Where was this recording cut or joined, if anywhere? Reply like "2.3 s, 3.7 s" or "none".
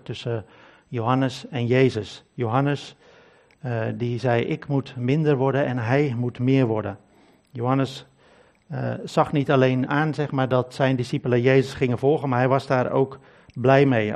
9.9 s